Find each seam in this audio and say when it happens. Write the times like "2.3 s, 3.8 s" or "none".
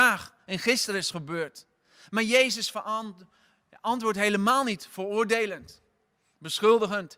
none

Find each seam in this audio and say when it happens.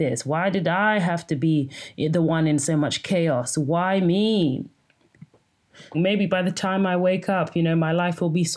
5.9 s

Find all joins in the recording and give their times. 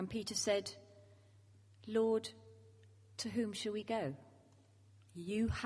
none

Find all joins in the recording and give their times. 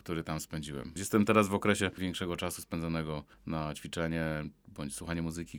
1.0 s

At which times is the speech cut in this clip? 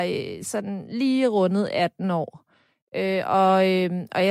none

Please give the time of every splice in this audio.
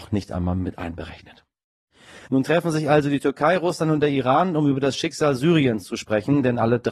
none

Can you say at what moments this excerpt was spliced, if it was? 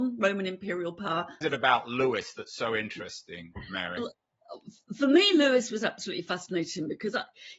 1.4 s

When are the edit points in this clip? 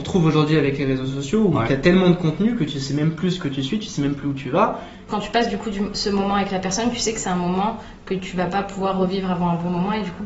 5.1 s

